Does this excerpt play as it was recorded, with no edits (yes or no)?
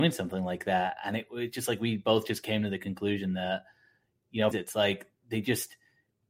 no